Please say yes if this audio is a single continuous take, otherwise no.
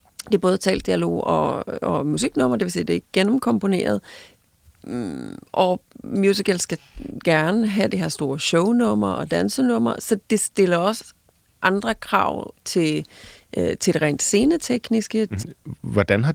no